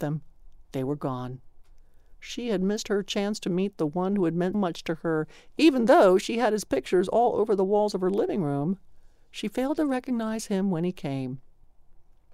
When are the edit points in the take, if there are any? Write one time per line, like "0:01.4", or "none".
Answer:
0:04.5